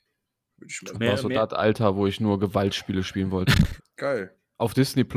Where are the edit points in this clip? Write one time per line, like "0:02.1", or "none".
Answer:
0:00.9
0:03.8